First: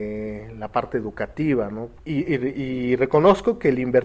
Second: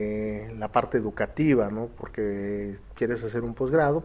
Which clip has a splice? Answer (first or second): first